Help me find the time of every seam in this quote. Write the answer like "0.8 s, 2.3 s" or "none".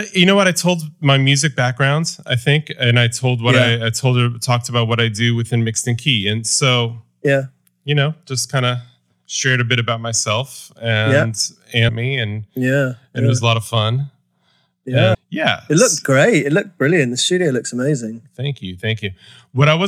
11.9 s, 15.1 s